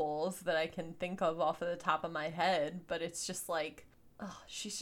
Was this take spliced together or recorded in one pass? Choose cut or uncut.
uncut